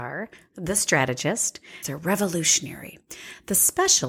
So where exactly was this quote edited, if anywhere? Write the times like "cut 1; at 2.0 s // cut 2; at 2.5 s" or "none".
cut 1; at 1.8 s